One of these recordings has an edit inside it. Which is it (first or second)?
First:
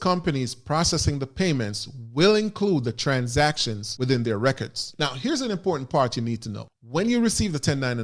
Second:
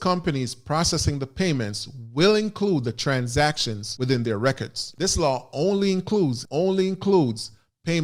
second